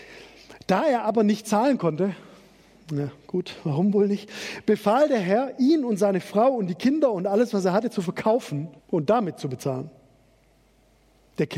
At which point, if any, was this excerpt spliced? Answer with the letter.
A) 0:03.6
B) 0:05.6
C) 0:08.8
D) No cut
C